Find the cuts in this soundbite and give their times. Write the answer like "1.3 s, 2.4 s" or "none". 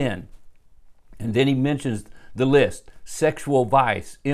none

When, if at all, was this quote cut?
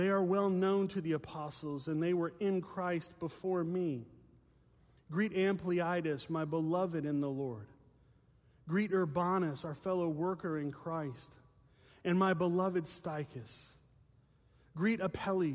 none

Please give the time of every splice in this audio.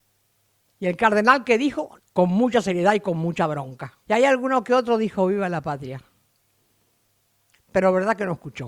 2.0 s, 4.0 s, 7.5 s

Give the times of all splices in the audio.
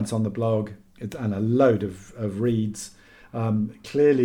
none

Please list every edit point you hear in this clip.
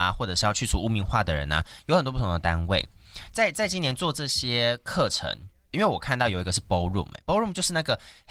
5.7 s

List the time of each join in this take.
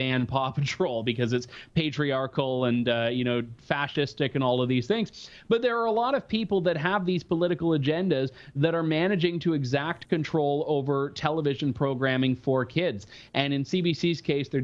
none

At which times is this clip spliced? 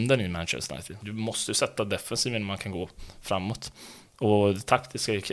1.0 s

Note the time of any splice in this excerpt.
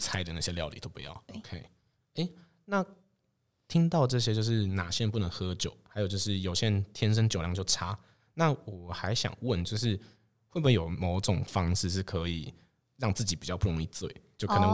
1.3 s

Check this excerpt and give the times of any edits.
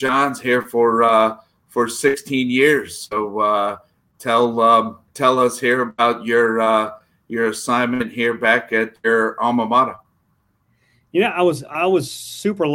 5.1 s

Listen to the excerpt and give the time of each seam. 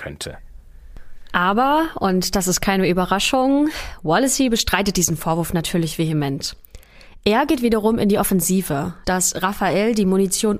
9.0 s

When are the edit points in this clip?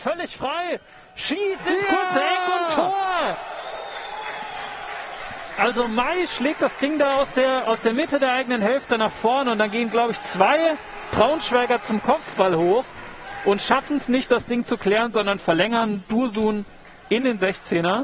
none

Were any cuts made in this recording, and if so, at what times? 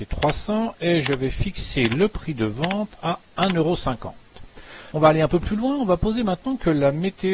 4.9 s

